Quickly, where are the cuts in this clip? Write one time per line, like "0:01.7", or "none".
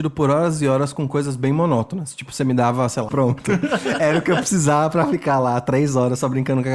0:03.1